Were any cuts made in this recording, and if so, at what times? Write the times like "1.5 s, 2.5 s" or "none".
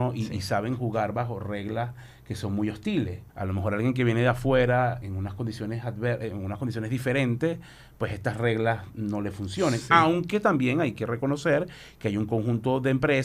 3.3 s, 5.0 s